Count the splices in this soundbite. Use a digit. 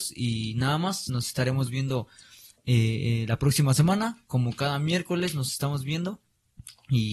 0